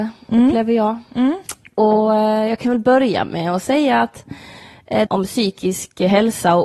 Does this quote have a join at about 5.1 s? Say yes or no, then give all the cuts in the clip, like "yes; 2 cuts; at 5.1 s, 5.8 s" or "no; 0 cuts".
yes; 1 cut; at 5.1 s